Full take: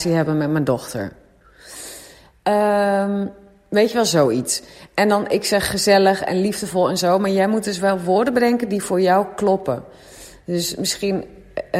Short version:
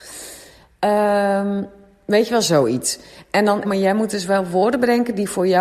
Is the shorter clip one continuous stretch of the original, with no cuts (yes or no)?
no